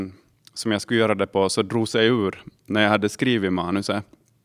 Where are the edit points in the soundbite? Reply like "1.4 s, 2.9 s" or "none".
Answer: none